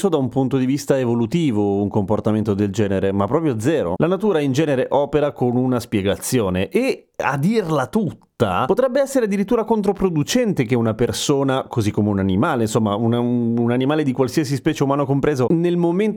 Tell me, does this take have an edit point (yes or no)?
no